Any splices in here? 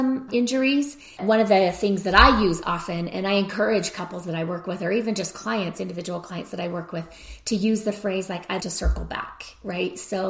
yes; 2 cuts; at 1.2 s, 8.6 s

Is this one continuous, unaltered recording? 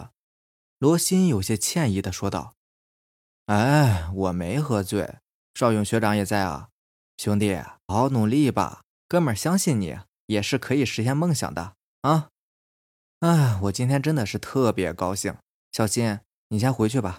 no; 1 cut; at 7.9 s

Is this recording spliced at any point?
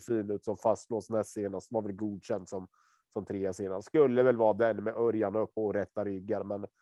yes; 1 cut; at 5.6 s

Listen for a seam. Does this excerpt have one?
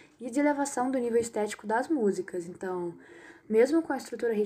no; 0 cuts

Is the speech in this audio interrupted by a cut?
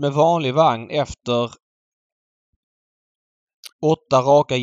yes; 1 cut; at 3.7 s

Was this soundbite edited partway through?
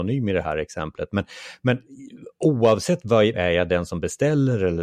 yes; 1 cut; at 3.3 s

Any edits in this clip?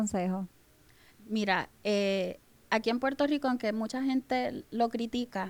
yes; 1 cut; at 1.1 s

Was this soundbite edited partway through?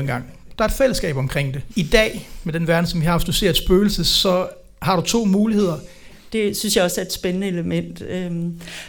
yes; 2 cuts; at 1.7 s, 6.3 s

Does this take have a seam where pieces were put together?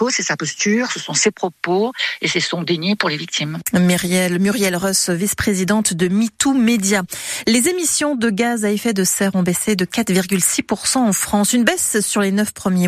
no; 0 cuts

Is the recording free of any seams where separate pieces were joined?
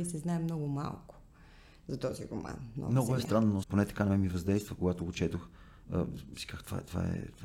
no; 1 cut; at 3.6 s

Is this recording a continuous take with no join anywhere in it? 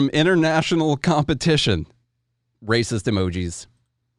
no; 1 cut; at 2.5 s

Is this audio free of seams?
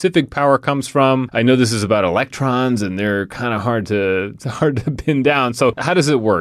yes; 0 cuts

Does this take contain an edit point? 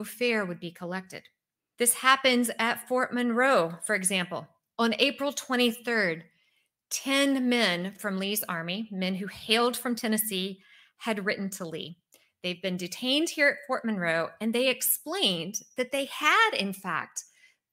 yes; 1 cut; at 1.7 s

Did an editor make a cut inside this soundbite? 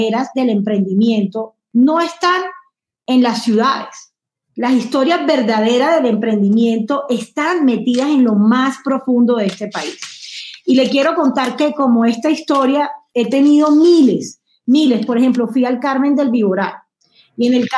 no; 0 cuts

